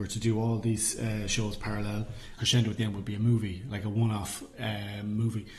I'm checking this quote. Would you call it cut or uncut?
cut